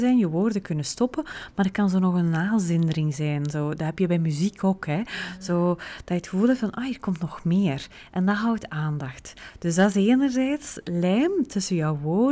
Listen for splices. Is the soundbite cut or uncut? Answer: uncut